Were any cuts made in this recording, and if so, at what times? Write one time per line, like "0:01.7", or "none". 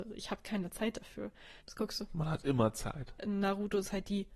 0:01.6
0:03.2